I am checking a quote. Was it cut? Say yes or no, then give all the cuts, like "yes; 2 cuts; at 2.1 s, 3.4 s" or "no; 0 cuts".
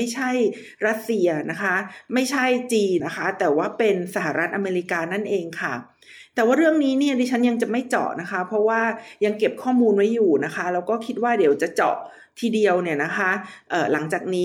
yes; 1 cut; at 3.0 s